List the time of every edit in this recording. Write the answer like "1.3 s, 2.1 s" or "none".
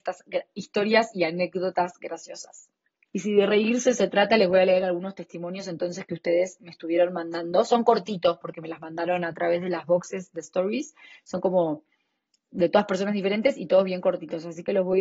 3.1 s